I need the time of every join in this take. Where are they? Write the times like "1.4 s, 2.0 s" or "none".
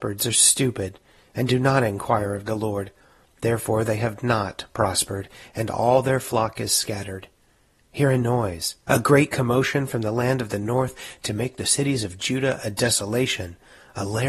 8.9 s